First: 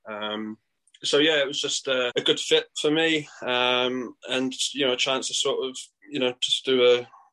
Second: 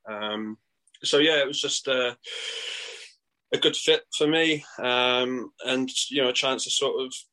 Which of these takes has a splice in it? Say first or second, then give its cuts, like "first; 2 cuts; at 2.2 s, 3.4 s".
first; 1 cut; at 2.1 s